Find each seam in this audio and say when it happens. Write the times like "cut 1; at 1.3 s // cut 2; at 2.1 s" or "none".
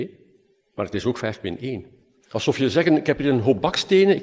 cut 1; at 2.2 s